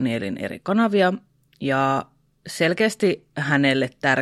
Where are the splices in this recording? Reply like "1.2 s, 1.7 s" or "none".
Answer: none